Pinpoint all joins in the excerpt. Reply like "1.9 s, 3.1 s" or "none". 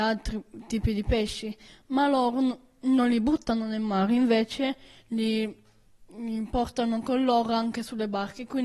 none